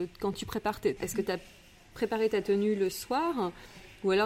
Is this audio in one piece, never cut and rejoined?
no; 1 cut; at 1.0 s

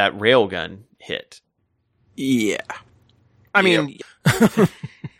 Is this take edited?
yes; 1 cut; at 4.0 s

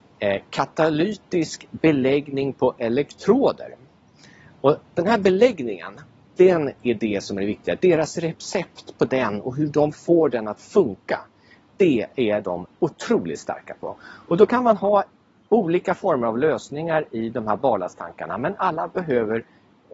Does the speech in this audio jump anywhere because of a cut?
no; 0 cuts

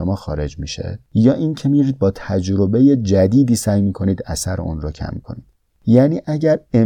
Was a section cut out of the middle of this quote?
yes; 1 cut; at 1.0 s

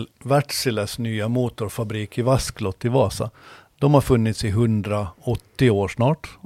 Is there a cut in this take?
no; 0 cuts

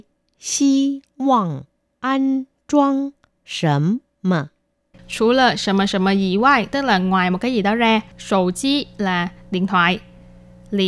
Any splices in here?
yes; 2 cuts; at 4.9 s, 8.1 s

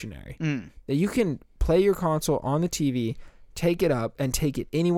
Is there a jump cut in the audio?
no; 0 cuts

